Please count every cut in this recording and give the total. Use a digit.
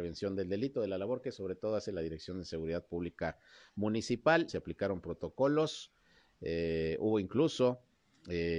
1